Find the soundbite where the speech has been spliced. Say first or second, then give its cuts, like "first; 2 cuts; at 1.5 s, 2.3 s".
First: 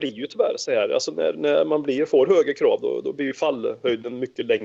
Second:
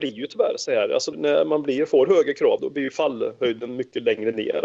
second; 2 cuts; at 1.1 s, 2.6 s